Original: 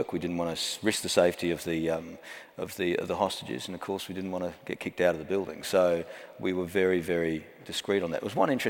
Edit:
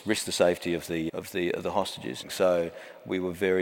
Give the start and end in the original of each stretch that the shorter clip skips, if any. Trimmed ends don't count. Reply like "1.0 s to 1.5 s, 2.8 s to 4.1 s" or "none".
1.9 s to 2.5 s, 3.7 s to 5.6 s